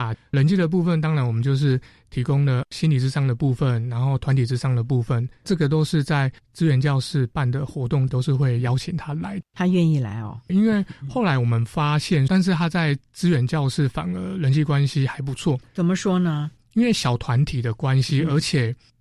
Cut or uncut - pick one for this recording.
cut